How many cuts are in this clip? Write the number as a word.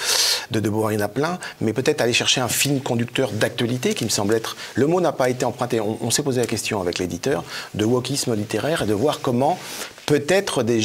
zero